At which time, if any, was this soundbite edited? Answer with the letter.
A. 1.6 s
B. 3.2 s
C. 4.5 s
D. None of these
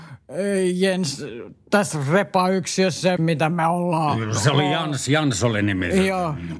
B